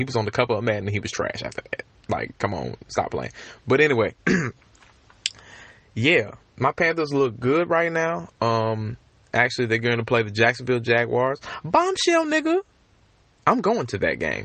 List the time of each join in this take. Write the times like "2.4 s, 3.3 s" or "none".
none